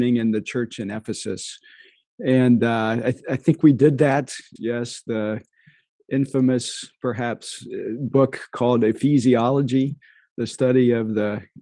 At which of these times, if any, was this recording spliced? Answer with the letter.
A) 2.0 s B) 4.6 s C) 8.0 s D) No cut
B